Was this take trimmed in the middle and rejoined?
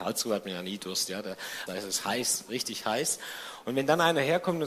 yes; 1 cut; at 1.7 s

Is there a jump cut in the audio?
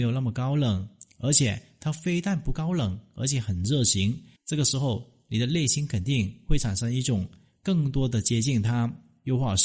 yes; 1 cut; at 4.4 s

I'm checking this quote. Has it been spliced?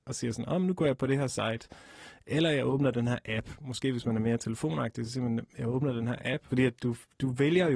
yes; 1 cut; at 6.5 s

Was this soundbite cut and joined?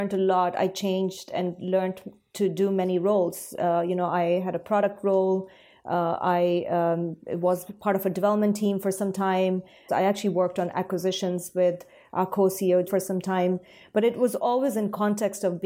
yes; 2 cuts; at 9.9 s, 12.9 s

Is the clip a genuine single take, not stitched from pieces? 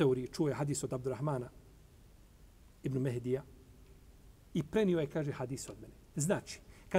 yes; 0 cuts

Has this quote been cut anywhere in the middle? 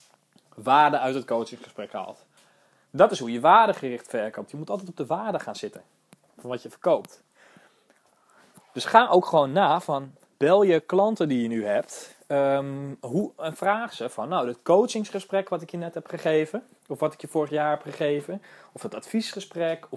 yes; 1 cut; at 16.8 s

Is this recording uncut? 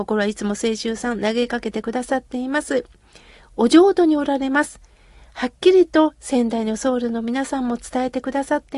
yes; 0 cuts

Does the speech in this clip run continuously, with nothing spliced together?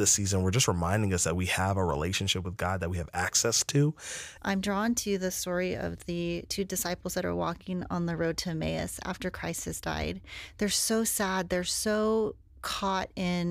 no; 1 cut; at 4.4 s

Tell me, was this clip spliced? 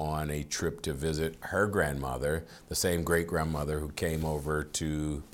no; 0 cuts

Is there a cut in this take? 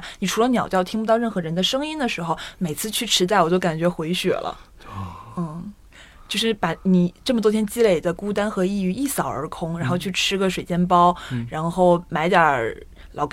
no; 0 cuts

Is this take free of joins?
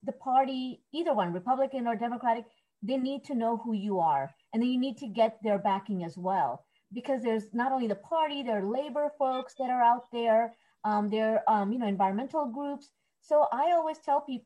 yes; 0 cuts

